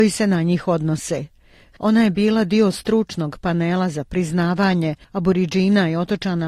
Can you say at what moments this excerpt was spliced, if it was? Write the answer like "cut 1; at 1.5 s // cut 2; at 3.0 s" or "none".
cut 1; at 1.7 s